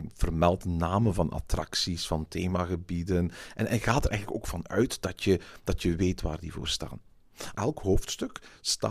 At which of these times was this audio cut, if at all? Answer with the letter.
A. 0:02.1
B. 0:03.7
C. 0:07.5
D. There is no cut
C